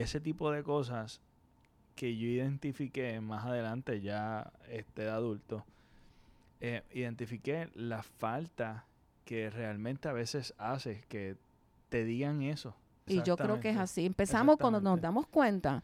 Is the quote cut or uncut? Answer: cut